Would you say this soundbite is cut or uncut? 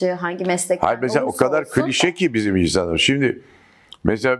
uncut